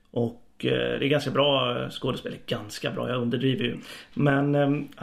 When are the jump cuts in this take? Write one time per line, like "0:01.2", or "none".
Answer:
0:03.7